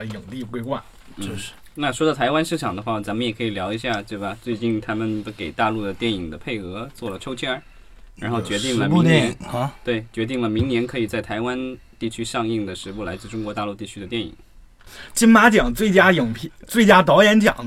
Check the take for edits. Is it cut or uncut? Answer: uncut